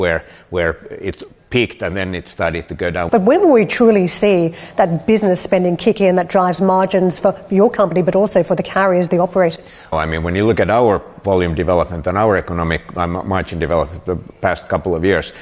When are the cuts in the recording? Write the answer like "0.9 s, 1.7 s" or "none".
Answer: 3.1 s, 9.9 s

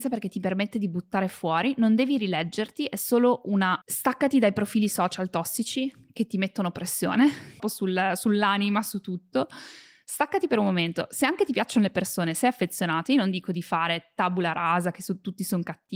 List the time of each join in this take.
3.8 s, 7.6 s

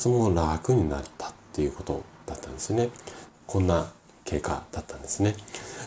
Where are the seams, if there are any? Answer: 3.3 s

